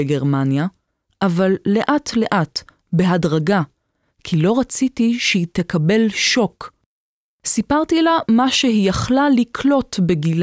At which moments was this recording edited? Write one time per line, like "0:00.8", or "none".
none